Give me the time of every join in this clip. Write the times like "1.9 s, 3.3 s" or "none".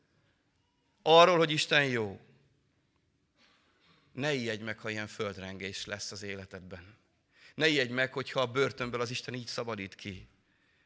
none